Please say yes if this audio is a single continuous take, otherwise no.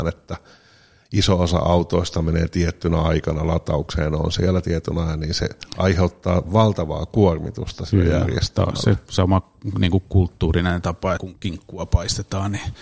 no